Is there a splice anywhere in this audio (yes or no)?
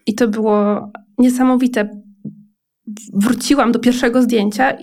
no